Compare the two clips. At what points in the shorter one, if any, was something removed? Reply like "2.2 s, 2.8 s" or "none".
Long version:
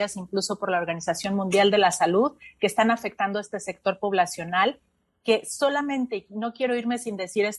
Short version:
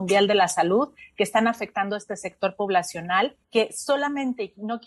3.4 s